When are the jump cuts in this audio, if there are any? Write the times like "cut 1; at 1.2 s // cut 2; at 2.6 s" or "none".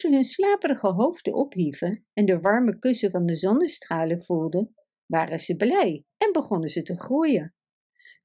none